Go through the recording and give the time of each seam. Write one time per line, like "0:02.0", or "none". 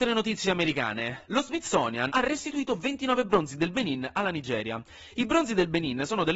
0:02.1